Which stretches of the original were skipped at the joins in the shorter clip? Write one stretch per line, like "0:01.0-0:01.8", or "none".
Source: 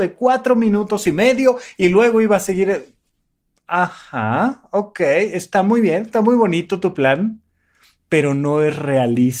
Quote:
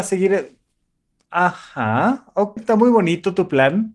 0:04.9-0:06.0